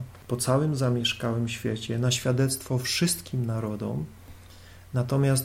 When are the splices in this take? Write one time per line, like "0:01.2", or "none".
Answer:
none